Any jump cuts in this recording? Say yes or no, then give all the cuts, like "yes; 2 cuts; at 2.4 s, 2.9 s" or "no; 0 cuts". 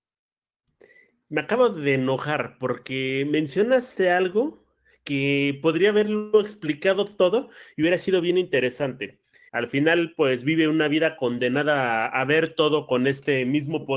yes; 1 cut; at 9.5 s